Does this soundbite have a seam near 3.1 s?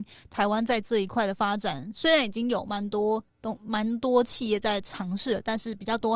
no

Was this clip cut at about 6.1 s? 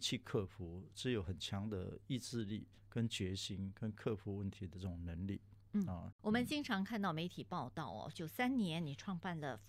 yes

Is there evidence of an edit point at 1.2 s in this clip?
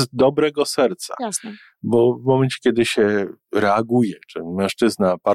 no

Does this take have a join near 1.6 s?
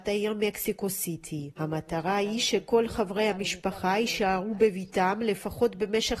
yes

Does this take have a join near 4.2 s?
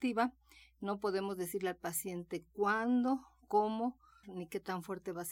yes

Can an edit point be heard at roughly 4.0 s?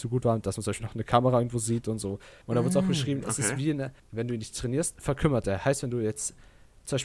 yes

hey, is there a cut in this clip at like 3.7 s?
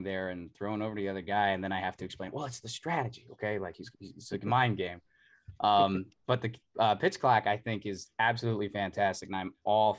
no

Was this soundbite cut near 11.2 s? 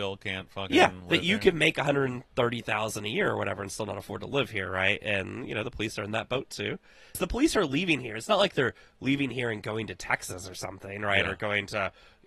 no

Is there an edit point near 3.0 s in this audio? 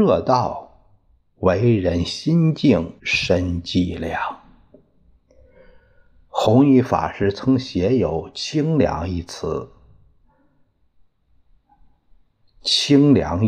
yes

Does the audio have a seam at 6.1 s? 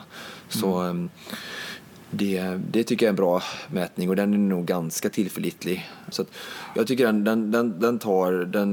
yes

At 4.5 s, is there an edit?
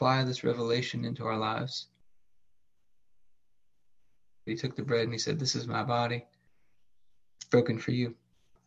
yes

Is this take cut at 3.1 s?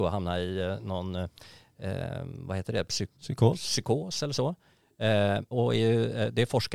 yes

